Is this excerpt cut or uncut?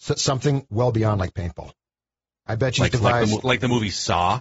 cut